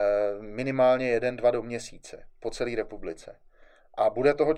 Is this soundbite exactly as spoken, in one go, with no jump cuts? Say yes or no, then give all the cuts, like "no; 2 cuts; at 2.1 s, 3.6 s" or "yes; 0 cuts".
yes; 0 cuts